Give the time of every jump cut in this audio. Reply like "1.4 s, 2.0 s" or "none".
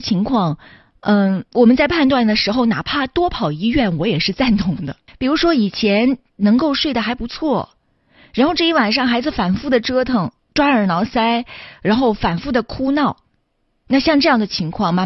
5.1 s